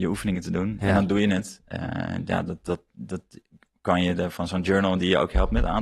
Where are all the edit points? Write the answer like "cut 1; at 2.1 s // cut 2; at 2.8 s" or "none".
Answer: none

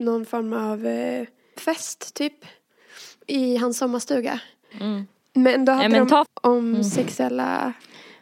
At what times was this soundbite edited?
cut 1; at 4.7 s // cut 2; at 6.3 s

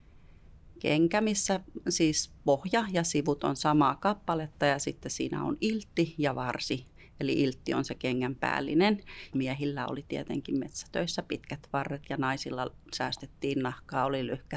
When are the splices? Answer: cut 1; at 9.3 s

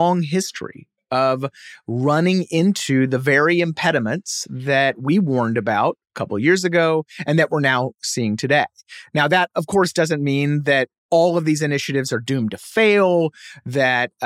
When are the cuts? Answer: none

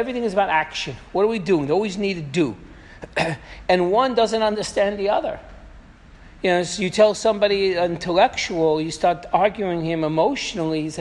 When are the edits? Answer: none

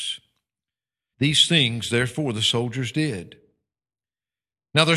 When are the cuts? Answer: cut 1; at 1.1 s

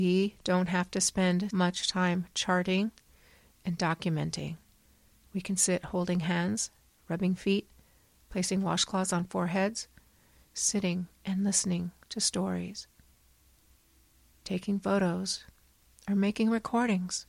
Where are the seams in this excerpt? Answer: cut 1; at 1.5 s

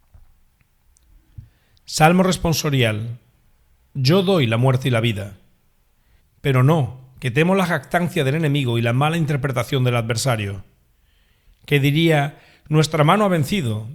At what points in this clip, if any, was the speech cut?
cut 1; at 6.2 s

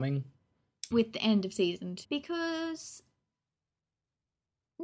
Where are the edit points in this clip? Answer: cut 1; at 0.9 s // cut 2; at 2.0 s

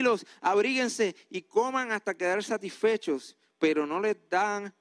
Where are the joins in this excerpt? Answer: none

